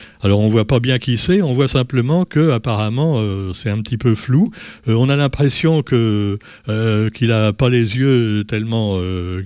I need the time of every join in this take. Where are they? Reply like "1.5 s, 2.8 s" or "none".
none